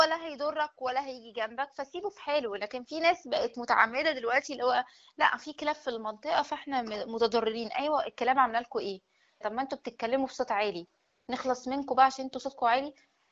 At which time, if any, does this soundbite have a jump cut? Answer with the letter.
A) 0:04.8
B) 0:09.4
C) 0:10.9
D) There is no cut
B